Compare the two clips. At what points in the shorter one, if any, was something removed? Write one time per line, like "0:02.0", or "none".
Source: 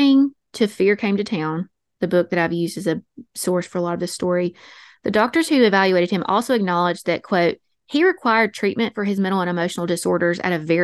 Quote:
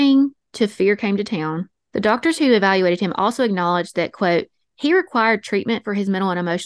0:01.9

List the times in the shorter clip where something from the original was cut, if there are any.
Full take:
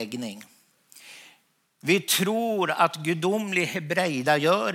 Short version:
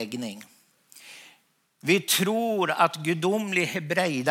none

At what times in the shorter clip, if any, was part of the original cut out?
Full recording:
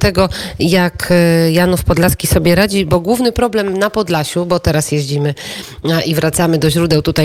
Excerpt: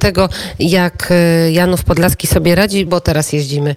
0:02.9

